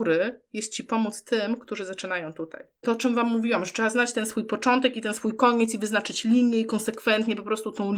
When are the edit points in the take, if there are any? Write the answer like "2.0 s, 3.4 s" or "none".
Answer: 2.8 s